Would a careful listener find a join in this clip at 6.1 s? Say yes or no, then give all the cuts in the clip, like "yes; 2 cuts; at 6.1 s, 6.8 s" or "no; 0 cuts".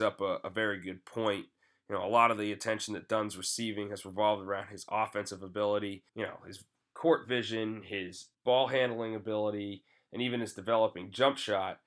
yes; 2 cuts; at 6.1 s, 8.3 s